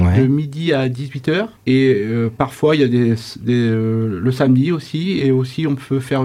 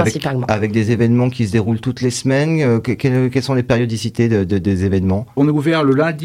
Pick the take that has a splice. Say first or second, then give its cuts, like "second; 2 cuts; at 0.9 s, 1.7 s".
first; 1 cut; at 1.6 s